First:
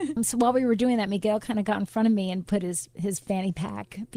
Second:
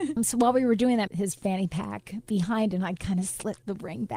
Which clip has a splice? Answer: second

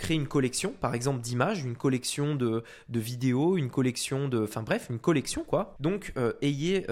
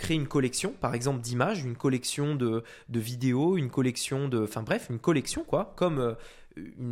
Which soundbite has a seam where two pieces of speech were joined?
first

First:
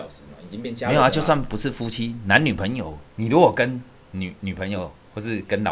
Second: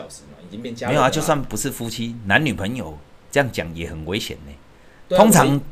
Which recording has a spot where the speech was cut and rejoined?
first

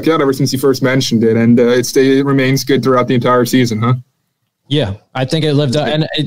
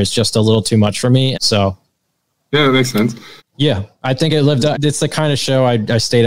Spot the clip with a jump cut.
second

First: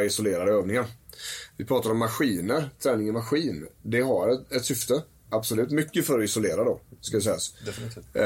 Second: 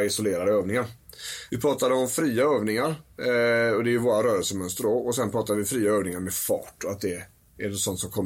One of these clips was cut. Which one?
second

